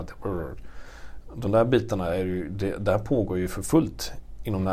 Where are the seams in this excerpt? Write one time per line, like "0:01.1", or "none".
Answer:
none